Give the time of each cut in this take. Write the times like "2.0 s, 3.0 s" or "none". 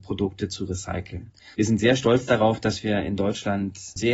1.5 s